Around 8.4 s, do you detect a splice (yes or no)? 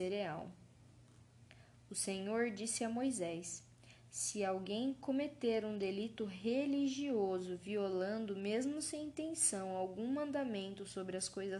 no